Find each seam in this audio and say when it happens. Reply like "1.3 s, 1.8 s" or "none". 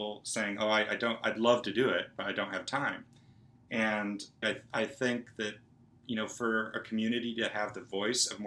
4.4 s